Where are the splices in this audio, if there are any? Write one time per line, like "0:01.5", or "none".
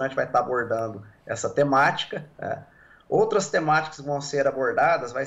none